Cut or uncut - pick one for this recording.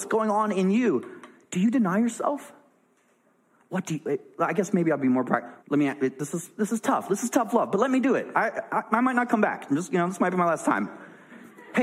cut